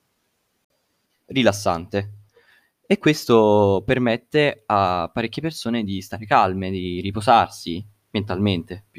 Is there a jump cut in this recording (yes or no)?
no